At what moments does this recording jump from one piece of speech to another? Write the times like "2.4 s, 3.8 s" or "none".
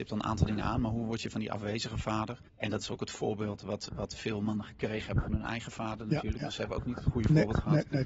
2.5 s